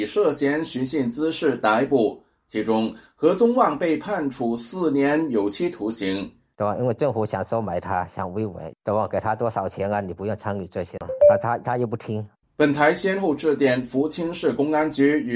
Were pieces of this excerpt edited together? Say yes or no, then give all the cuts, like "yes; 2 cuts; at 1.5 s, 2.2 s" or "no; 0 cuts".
yes; 1 cut; at 6.5 s